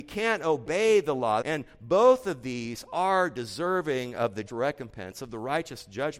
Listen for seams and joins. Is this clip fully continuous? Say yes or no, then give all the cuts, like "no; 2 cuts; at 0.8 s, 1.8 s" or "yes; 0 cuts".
no; 2 cuts; at 1.4 s, 4.5 s